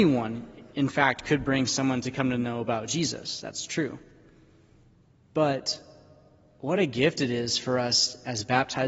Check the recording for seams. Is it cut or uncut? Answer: uncut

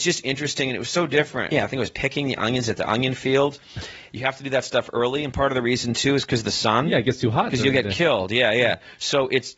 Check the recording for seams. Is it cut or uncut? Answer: cut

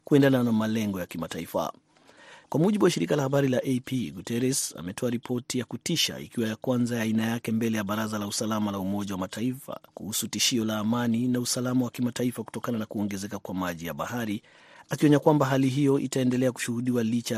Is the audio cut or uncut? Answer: cut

